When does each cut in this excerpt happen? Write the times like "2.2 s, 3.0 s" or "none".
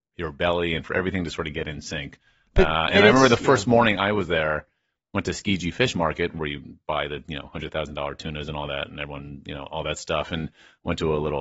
6.3 s